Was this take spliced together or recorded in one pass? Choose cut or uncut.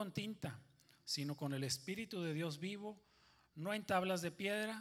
uncut